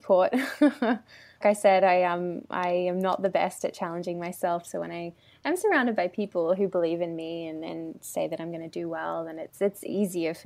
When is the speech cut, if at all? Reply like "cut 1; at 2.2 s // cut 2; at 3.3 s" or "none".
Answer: cut 1; at 1.4 s